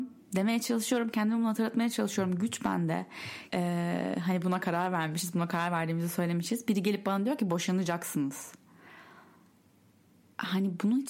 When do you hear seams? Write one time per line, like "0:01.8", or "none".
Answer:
0:03.5